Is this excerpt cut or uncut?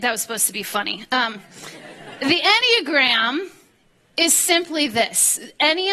uncut